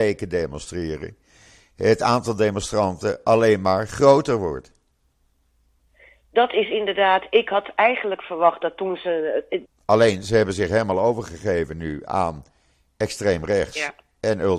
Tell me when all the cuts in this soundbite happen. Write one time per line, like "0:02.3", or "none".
0:09.6